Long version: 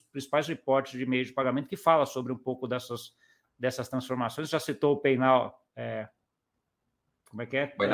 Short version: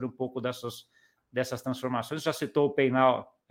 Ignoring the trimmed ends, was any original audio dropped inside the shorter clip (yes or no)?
no